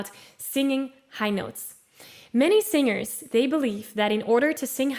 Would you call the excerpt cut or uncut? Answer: uncut